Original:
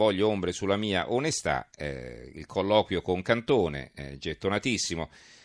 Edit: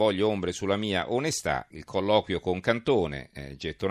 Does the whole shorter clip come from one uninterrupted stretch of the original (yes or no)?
no